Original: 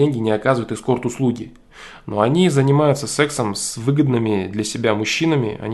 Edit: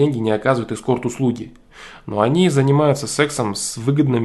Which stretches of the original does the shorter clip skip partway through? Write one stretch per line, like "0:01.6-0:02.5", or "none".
none